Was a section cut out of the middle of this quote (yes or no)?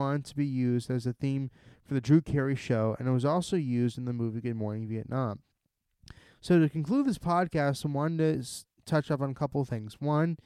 no